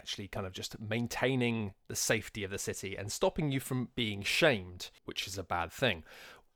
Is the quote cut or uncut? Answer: cut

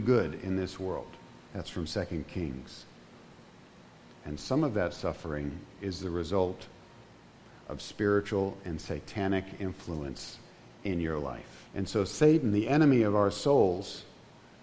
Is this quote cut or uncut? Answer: cut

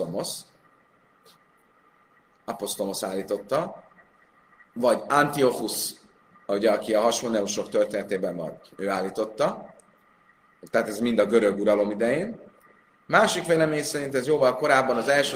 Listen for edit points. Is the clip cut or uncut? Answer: uncut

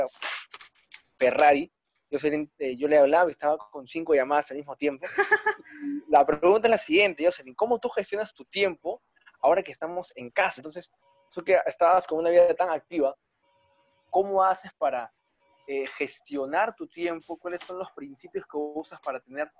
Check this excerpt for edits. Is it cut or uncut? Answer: cut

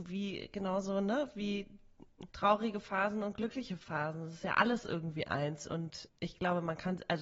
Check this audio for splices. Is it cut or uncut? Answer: cut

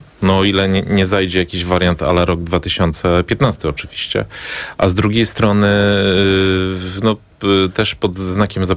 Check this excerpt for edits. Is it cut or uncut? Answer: uncut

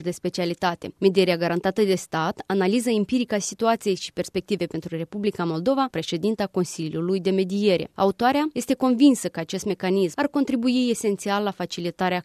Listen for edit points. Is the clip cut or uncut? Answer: cut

